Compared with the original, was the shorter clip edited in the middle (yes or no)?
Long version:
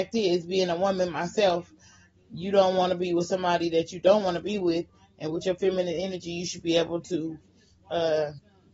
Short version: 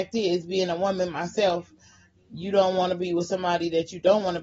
no